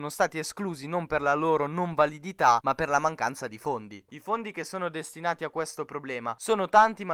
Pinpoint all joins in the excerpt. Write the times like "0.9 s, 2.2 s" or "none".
4.1 s

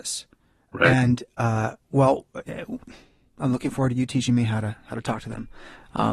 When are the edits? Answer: 1.8 s

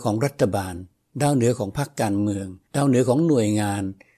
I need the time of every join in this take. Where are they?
2.6 s

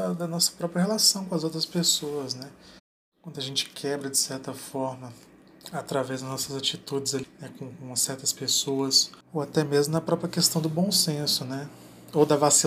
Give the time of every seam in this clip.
7.2 s, 9.2 s

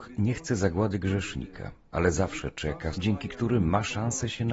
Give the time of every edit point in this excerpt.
2.9 s

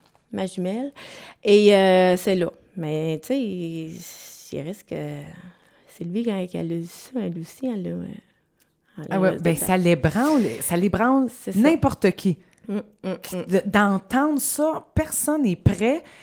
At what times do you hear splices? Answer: none

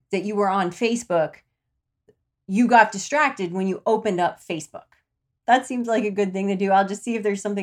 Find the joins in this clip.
5.4 s

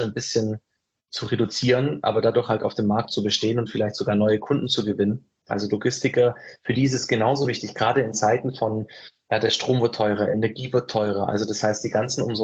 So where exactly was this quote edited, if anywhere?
5.5 s

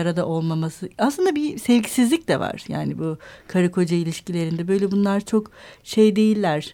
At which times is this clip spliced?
none

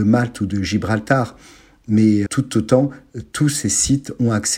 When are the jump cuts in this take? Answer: 2.3 s

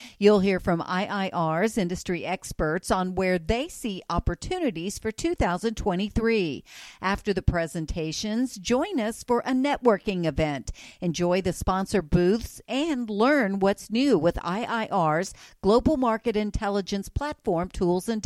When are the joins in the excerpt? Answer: none

